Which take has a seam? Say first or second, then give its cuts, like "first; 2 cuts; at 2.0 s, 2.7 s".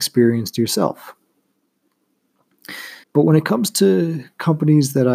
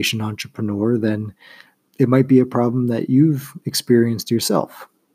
first; 1 cut; at 3.0 s